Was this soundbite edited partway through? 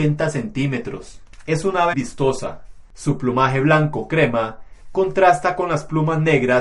yes; 1 cut; at 1.9 s

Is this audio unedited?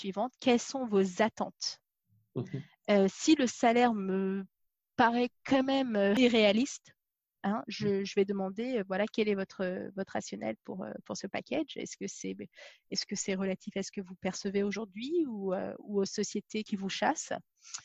yes; 0 cuts

